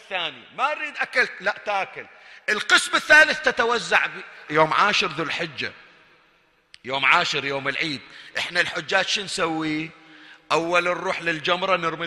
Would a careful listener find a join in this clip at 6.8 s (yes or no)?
no